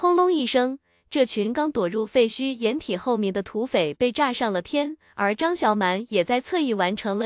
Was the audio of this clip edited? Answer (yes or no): yes